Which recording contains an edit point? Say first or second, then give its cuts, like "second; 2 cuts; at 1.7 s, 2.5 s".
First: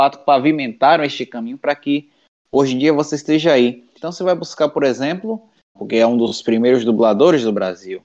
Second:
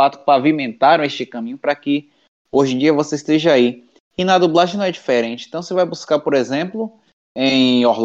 first; 2 cuts; at 4.0 s, 5.8 s